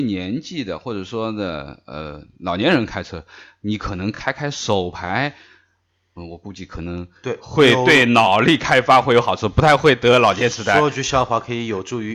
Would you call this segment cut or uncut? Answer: uncut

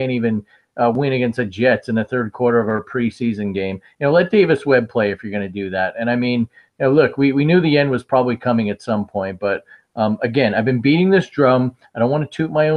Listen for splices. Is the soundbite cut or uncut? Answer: uncut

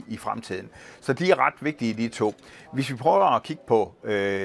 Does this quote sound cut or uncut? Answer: uncut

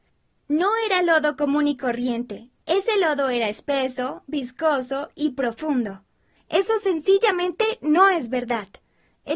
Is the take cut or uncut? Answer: cut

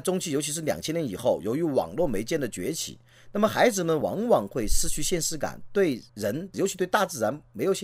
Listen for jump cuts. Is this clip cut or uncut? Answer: uncut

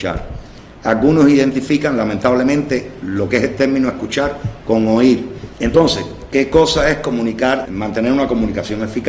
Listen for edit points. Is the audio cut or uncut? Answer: cut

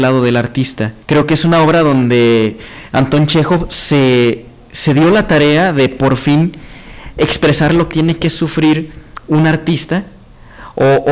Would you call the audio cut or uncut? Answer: cut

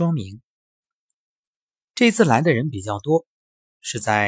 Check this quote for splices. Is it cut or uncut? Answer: uncut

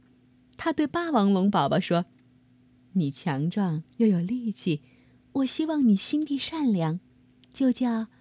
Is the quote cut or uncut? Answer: uncut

